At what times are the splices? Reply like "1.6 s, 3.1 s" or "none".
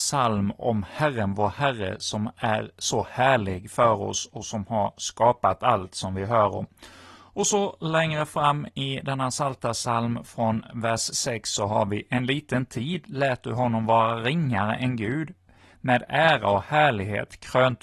none